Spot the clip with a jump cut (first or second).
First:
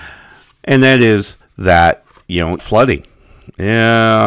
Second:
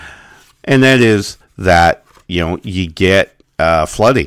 first